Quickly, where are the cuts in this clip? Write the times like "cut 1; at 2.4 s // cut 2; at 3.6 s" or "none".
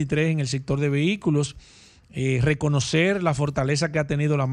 none